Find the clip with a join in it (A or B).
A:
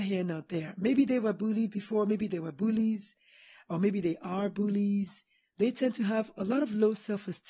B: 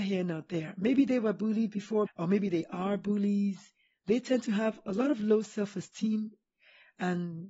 B